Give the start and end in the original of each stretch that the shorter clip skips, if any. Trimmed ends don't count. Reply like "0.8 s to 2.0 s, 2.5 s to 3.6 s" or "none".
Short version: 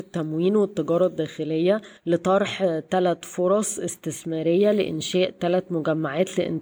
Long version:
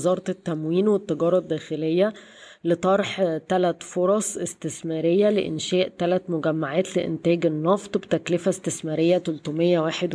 2.3 s to 2.6 s